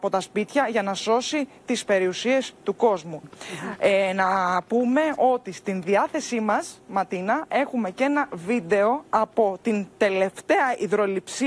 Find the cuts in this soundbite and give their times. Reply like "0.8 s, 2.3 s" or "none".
3.2 s